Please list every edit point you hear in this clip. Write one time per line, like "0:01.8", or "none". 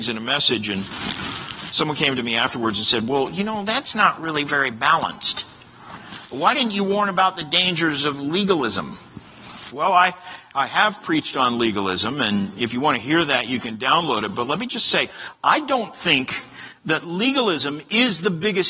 0:09.7